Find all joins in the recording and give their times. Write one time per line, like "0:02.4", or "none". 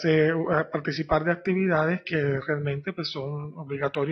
none